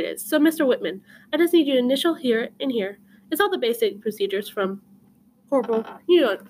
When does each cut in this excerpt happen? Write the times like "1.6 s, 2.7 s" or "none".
none